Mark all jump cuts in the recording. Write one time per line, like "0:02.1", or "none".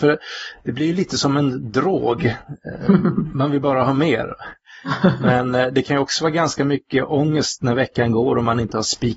none

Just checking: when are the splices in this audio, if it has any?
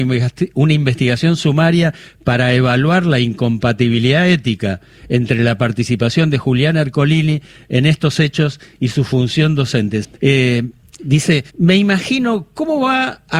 0:10.0
0:11.5

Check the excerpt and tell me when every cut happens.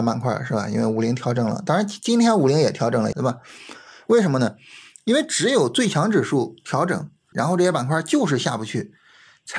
0:03.1
0:07.3

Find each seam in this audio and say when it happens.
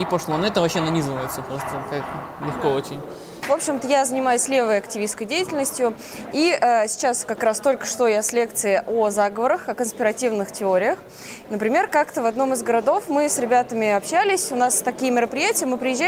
0:06.3
0:11.4

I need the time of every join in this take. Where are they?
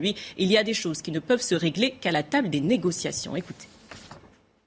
none

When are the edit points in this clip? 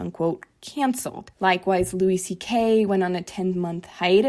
none

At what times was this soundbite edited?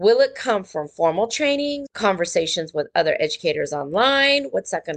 0:01.9

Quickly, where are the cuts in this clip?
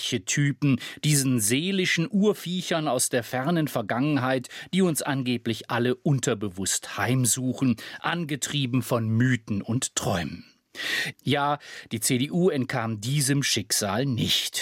0:11.1

